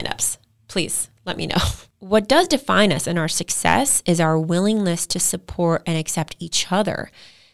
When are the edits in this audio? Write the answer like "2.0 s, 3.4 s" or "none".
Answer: 1.9 s